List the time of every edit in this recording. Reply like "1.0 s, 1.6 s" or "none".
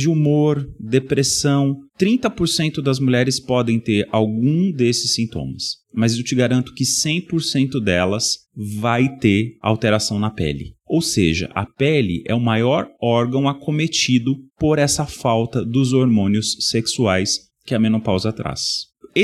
none